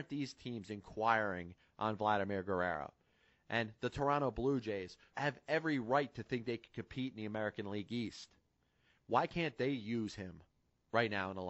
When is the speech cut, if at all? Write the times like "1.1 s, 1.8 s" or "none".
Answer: 5.1 s